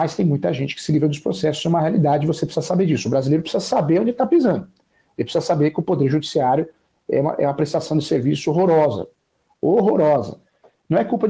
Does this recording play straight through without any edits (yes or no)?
yes